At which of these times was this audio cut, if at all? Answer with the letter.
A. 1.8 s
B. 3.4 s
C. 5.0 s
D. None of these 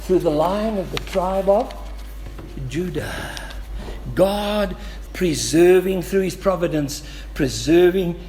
C